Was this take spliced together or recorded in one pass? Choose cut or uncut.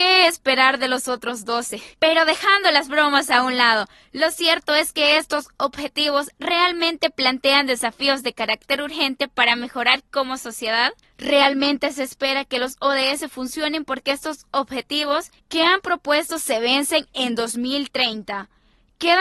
cut